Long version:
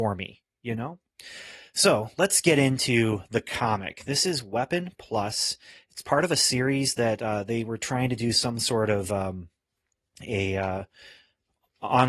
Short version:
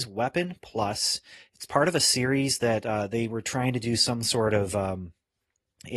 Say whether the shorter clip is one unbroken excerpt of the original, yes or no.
yes